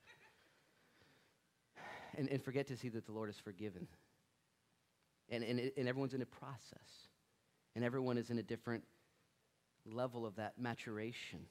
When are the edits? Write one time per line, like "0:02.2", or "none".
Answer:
none